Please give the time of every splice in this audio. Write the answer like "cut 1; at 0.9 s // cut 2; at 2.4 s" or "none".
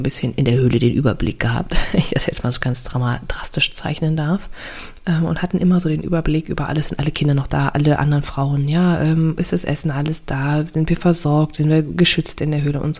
none